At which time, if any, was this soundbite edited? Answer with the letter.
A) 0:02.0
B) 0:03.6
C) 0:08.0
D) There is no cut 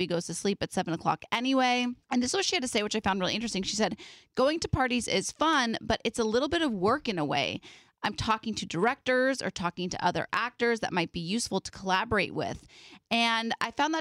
A